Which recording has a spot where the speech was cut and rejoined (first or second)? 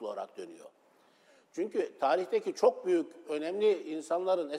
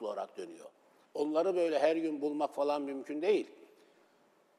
second